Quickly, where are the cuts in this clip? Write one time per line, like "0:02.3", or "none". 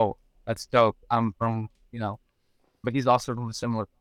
0:02.8

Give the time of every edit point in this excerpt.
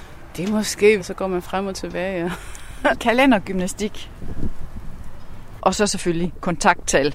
0:01.0
0:02.9
0:05.6

